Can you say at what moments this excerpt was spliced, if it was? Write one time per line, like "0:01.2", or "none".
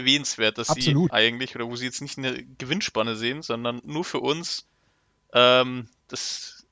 0:01.1